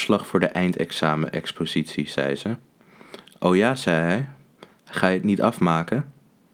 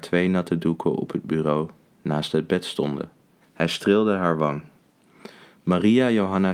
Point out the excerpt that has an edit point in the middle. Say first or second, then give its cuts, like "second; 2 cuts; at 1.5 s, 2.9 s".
second; 1 cut; at 3.4 s